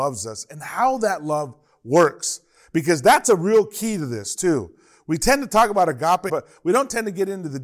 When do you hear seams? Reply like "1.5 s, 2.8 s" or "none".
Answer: 6.3 s